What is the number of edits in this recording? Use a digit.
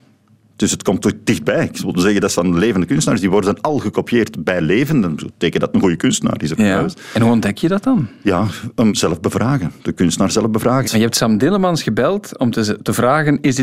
2